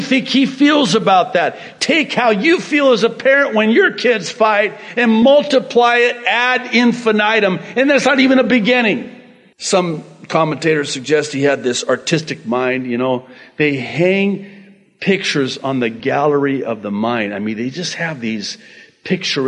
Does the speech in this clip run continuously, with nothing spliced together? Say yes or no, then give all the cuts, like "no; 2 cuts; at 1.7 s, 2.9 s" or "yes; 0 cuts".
no; 1 cut; at 9.5 s